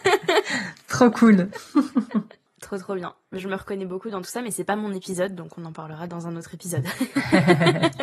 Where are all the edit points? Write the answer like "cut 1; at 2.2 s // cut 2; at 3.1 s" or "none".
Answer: cut 1; at 2.5 s

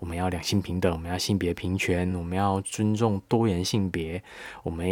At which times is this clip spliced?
none

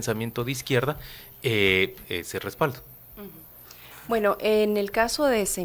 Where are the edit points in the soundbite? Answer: cut 1; at 2.0 s

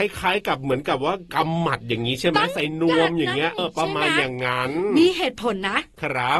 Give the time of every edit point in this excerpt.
cut 1; at 3.6 s

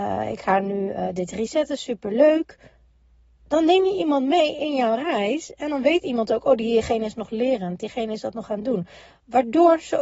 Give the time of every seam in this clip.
none

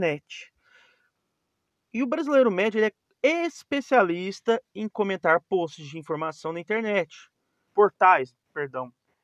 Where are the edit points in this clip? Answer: cut 1; at 7.7 s

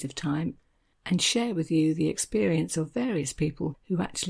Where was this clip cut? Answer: none

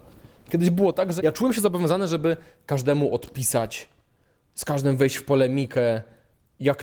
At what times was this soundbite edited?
cut 1; at 1.2 s

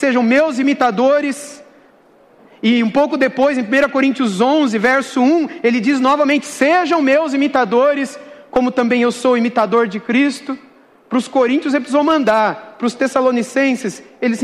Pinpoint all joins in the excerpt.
none

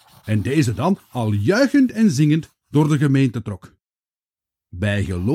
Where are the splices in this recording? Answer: none

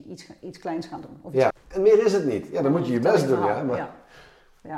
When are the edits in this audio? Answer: cut 1; at 1.5 s

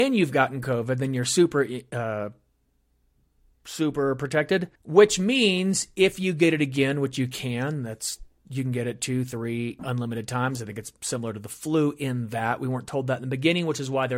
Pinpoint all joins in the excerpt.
cut 1; at 4.8 s // cut 2; at 9.8 s

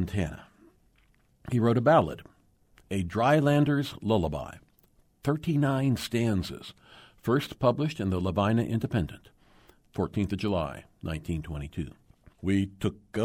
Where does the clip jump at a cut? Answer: cut 1; at 12.3 s

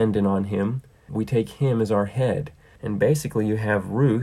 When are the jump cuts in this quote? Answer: cut 1; at 1.1 s // cut 2; at 2.8 s

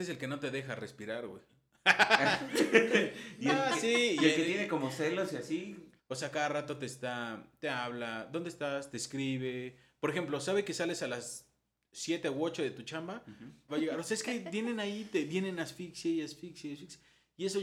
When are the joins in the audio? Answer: cut 1; at 6.0 s // cut 2; at 13.7 s

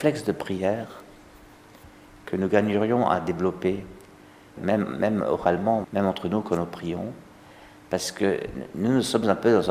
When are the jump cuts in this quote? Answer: cut 1; at 4.6 s // cut 2; at 5.8 s

